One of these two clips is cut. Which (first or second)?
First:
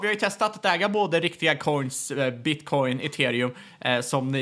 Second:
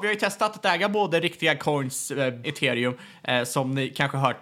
second